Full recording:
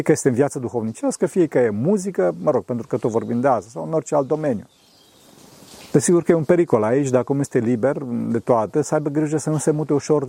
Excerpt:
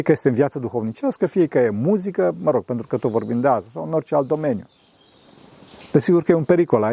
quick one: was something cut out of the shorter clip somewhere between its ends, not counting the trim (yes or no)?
no